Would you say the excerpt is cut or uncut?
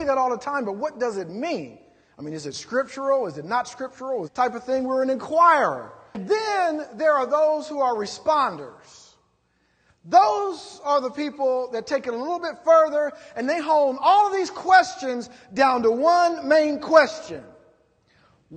cut